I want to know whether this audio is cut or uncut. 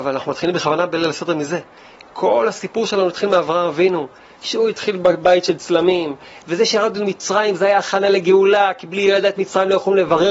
uncut